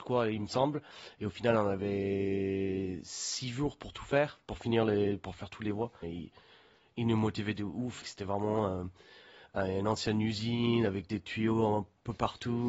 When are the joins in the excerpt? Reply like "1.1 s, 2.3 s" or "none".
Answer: 6.0 s, 8.0 s